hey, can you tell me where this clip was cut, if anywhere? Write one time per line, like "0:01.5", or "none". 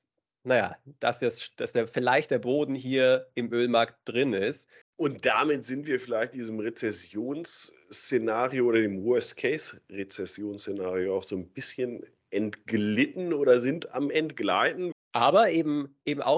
0:04.8
0:14.9